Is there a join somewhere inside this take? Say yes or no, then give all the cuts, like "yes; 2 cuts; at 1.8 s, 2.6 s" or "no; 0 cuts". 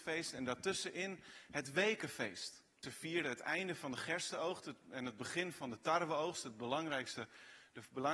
yes; 1 cut; at 2.8 s